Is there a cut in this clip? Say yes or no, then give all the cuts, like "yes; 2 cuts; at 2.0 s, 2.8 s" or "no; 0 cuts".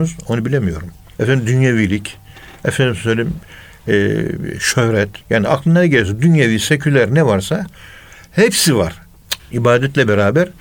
yes; 3 cuts; at 1.2 s, 5.2 s, 9.4 s